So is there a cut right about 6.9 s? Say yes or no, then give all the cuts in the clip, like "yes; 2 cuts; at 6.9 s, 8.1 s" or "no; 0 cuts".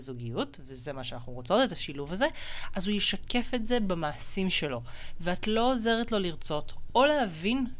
no; 0 cuts